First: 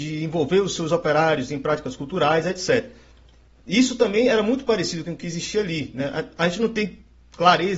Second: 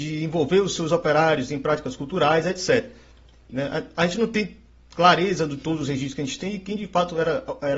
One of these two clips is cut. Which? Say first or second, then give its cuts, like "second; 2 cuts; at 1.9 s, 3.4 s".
second; 1 cut; at 3.5 s